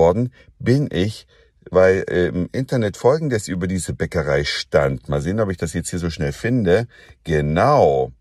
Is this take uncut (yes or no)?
yes